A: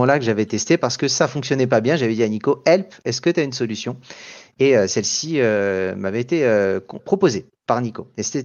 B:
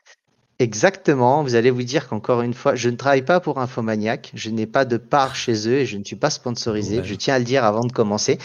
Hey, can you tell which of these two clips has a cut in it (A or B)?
A